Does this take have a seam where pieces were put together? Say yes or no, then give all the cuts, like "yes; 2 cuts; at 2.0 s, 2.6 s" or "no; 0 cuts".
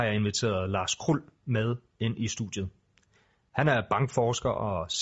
no; 0 cuts